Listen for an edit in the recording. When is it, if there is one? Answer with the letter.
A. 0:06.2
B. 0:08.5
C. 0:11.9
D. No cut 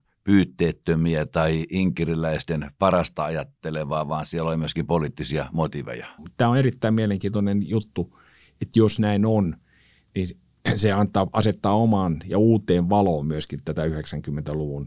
A